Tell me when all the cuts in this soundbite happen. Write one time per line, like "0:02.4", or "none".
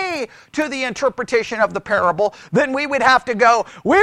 none